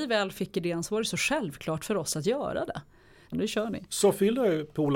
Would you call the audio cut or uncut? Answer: cut